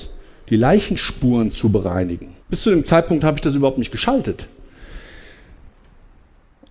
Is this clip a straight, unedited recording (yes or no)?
no